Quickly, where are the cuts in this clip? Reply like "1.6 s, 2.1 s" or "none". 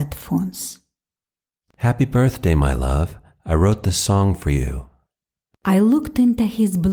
none